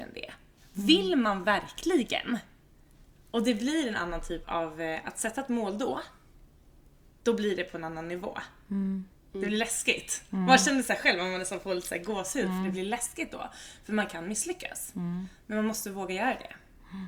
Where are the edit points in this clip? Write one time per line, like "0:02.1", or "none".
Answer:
0:04.4